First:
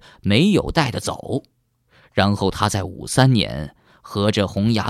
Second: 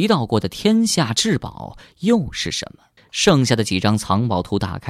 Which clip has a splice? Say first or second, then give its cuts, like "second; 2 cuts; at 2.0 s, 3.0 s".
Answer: second; 1 cut; at 3.0 s